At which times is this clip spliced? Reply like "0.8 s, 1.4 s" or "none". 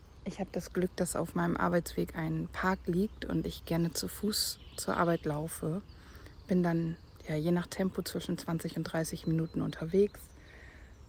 none